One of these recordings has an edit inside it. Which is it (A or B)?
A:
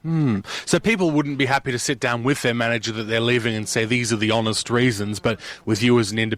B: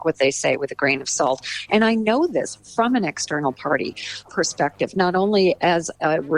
B